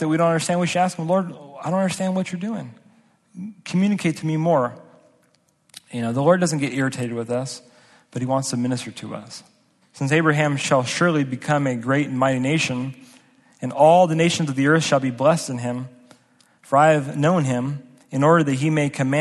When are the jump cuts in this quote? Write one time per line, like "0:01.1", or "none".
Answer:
0:09.8